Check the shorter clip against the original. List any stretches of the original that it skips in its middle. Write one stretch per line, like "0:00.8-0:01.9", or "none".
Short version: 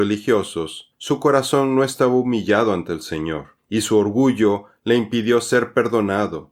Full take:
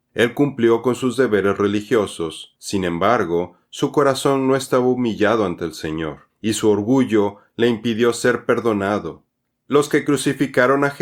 0:02.6-0:03.6